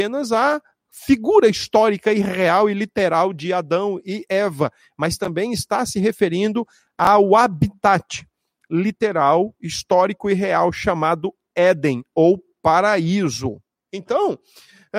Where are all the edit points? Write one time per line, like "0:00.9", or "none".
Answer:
0:13.9